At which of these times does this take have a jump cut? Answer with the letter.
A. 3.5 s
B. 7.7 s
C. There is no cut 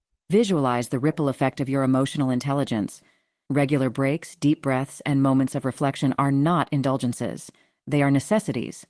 A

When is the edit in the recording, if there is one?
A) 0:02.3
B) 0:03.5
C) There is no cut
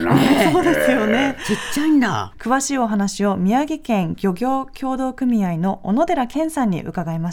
A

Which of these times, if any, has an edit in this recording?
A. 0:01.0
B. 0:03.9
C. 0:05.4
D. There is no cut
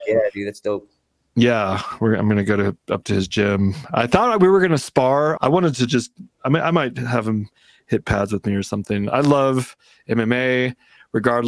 C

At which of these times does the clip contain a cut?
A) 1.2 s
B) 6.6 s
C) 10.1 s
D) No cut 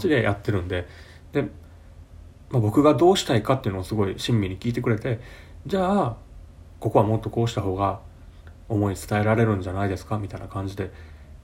A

